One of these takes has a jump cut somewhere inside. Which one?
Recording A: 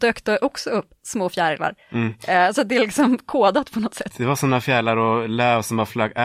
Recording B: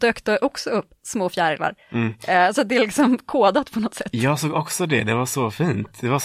A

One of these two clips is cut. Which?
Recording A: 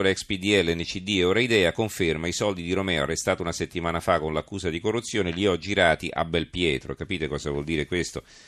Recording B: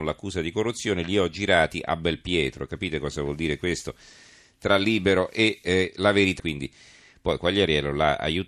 B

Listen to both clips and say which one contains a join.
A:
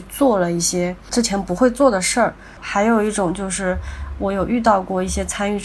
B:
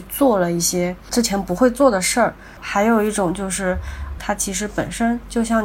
B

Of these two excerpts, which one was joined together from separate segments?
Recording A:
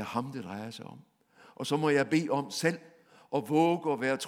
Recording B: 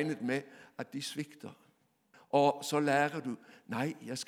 B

